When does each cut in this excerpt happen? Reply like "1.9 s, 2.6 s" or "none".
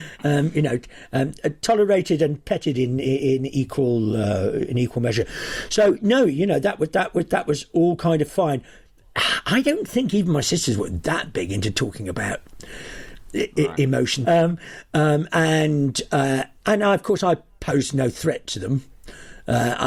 14.2 s, 16.6 s